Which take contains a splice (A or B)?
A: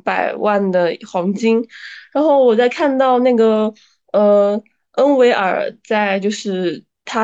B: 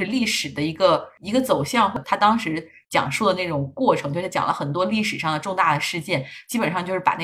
B